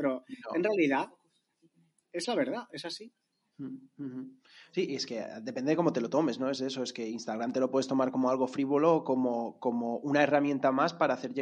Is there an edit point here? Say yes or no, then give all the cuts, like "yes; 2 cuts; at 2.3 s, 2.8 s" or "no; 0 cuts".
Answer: no; 0 cuts